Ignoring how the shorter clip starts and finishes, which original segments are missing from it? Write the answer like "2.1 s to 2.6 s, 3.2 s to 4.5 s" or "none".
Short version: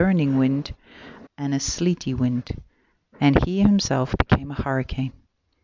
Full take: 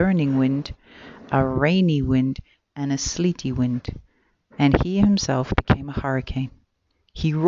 1.3 s to 2.6 s